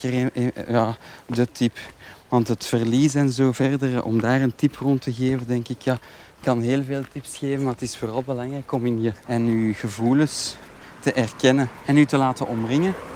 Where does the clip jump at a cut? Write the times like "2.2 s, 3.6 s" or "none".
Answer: 9.2 s, 11.8 s